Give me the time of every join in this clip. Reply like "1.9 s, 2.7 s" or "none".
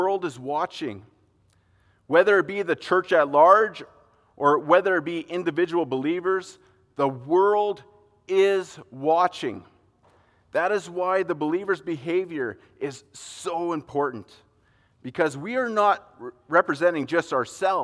none